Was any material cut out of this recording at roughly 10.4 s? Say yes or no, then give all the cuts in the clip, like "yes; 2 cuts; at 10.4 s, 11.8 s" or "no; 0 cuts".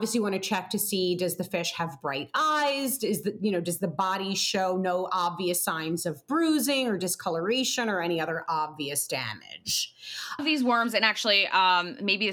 yes; 1 cut; at 10.4 s